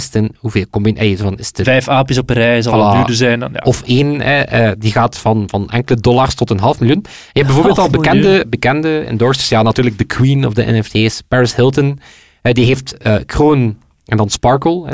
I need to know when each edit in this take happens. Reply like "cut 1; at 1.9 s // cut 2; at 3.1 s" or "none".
none

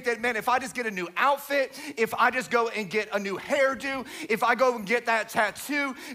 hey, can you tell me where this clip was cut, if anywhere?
none

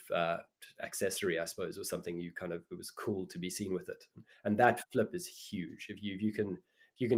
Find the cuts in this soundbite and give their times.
none

